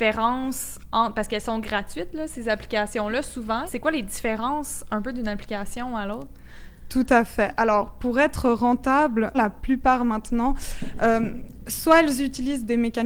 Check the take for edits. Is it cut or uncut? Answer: cut